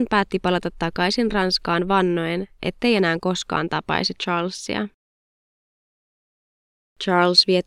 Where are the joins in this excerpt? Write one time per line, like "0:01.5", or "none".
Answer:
none